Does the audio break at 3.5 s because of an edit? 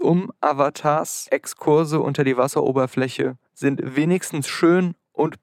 yes; 1 cut; at 3.5 s

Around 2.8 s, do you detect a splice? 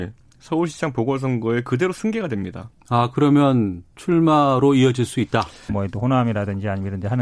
yes; 2 cuts; at 2.8 s, 5.7 s

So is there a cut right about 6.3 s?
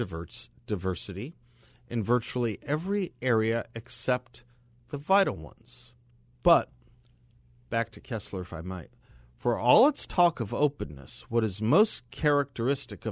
yes; 1 cut; at 6.3 s

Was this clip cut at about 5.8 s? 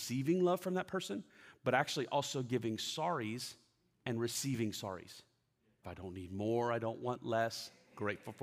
yes; 1 cut; at 5.8 s

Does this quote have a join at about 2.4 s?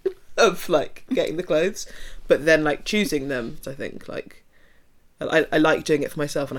no; 1 cut; at 3.6 s

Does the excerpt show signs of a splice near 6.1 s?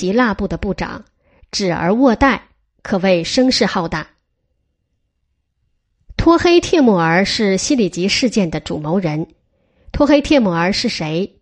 no; 0 cuts

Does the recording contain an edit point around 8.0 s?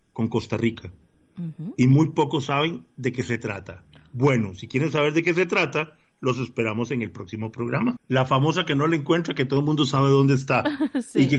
yes; 1 cut; at 8.0 s

